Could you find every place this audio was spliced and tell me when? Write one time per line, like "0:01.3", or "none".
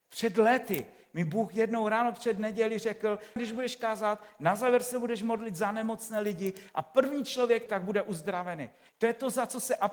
0:03.4
0:07.7
0:08.9